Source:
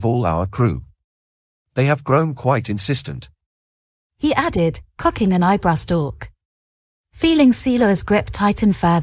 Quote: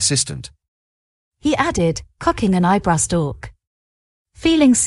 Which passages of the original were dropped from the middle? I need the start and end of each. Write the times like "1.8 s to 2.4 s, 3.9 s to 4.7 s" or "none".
none